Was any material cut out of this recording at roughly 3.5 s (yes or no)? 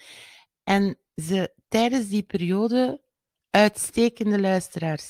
no